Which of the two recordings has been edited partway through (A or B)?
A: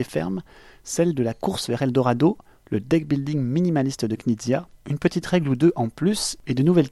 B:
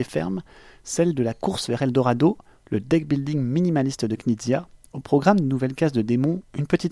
A